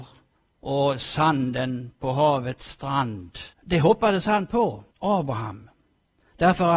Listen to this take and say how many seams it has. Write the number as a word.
two